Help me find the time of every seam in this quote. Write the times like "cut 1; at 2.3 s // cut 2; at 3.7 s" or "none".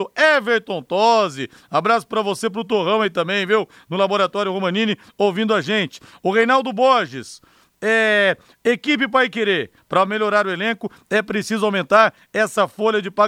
cut 1; at 9.8 s